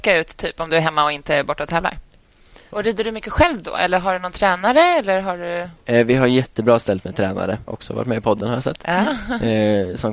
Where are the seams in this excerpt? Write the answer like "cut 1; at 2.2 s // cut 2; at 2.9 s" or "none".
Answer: cut 1; at 2.7 s // cut 2; at 7.7 s